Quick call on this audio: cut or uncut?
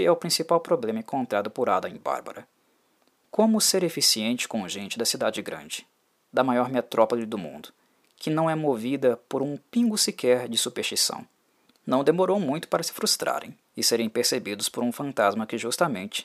cut